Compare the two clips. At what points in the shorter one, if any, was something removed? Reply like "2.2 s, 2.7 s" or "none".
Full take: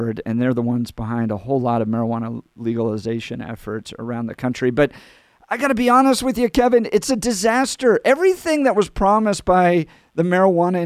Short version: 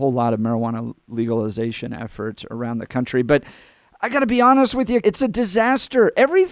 5.0 s

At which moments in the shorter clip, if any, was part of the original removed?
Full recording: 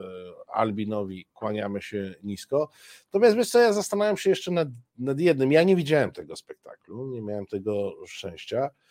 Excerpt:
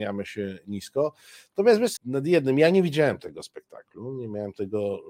2.0 s

